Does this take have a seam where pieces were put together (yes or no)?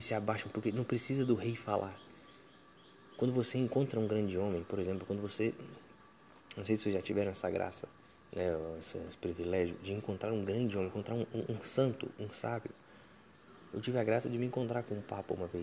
no